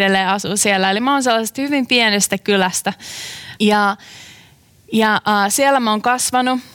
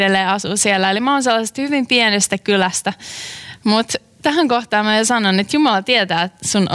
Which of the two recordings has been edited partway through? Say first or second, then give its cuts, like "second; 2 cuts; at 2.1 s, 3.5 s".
first; 1 cut; at 3.6 s